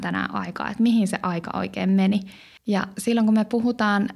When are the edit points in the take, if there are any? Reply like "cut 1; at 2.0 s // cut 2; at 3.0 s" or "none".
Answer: cut 1; at 2.6 s